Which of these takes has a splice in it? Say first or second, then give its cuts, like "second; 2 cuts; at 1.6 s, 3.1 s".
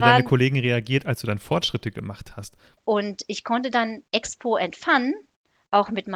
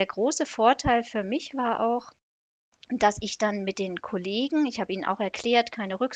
first; 1 cut; at 2.8 s